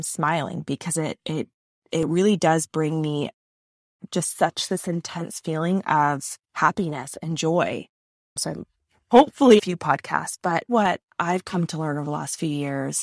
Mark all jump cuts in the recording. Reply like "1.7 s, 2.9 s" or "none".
8.3 s, 9.6 s, 10.7 s